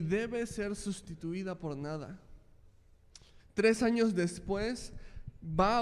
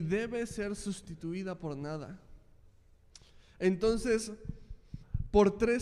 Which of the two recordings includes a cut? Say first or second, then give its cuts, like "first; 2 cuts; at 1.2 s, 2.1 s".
first; 1 cut; at 3.4 s